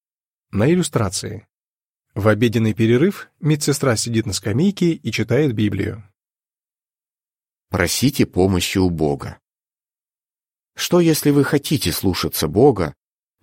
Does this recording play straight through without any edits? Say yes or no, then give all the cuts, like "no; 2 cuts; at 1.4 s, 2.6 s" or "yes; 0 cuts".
yes; 0 cuts